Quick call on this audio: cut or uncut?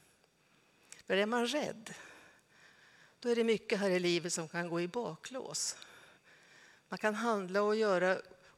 uncut